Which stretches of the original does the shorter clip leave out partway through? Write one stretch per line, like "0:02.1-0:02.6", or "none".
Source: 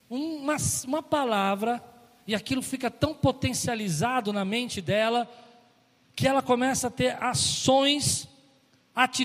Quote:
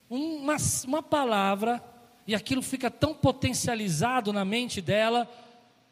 none